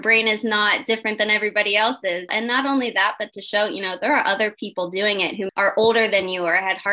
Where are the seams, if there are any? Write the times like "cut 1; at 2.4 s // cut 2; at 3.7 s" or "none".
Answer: cut 1; at 2.3 s // cut 2; at 5.5 s